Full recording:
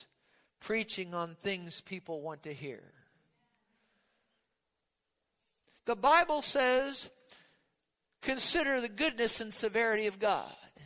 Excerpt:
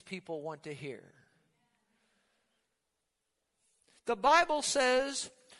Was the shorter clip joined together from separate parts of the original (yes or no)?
no